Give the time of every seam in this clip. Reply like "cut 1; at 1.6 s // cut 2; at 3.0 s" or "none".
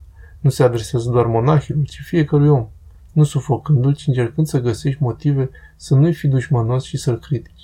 cut 1; at 2.9 s